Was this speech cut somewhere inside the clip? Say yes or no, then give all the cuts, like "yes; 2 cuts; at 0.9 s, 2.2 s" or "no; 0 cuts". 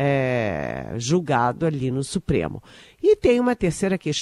no; 0 cuts